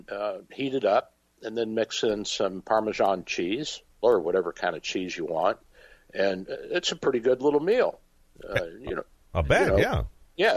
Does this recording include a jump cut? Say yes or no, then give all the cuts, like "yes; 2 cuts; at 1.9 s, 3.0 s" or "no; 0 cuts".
yes; 1 cut; at 4.0 s